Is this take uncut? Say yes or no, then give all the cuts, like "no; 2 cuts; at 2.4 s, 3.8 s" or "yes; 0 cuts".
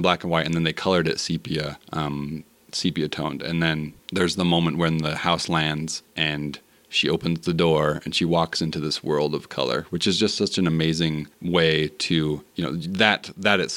yes; 0 cuts